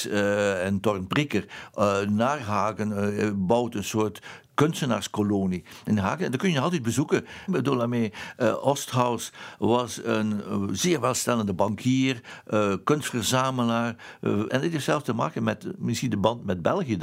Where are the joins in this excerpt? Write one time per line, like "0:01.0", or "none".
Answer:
0:07.5
0:14.5